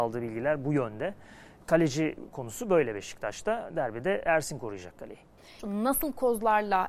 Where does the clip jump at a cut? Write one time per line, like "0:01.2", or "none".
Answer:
0:01.6
0:05.6